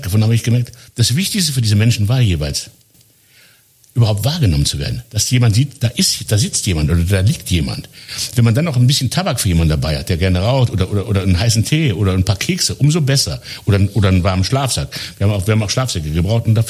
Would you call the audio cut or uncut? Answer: cut